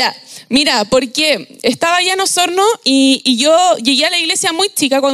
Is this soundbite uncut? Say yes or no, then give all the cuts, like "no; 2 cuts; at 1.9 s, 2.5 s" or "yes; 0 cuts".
yes; 0 cuts